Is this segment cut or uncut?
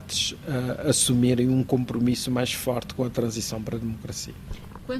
uncut